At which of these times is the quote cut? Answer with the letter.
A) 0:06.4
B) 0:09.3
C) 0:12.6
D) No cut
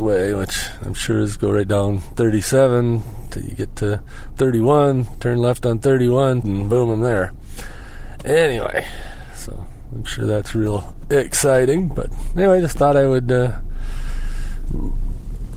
A